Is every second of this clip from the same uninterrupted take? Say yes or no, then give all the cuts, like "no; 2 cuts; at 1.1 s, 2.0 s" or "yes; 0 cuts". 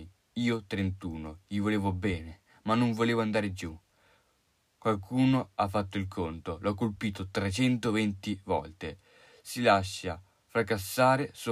yes; 0 cuts